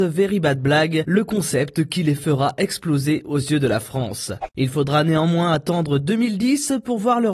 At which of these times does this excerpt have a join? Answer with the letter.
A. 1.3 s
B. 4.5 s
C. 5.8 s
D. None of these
B